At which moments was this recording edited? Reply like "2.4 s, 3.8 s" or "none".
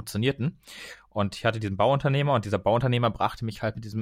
none